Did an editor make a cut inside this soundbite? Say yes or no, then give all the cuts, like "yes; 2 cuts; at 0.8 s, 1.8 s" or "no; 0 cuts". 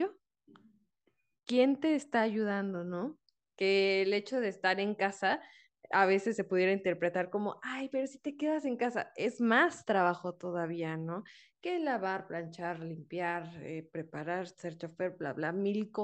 yes; 1 cut; at 3.5 s